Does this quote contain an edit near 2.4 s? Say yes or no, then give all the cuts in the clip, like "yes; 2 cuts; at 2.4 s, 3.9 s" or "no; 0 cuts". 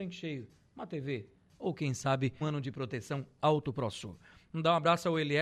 yes; 1 cut; at 2.4 s